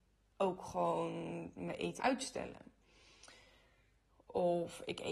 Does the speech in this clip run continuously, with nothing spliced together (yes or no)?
no